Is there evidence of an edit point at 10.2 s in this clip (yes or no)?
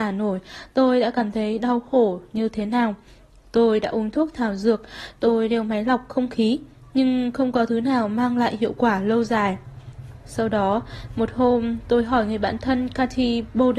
no